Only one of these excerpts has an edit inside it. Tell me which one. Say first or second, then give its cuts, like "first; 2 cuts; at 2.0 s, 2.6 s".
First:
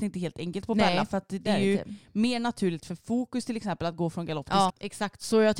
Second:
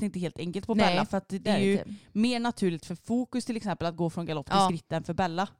first; 1 cut; at 4.7 s